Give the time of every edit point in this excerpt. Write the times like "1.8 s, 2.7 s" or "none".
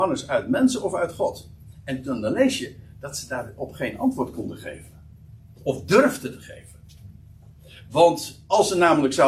none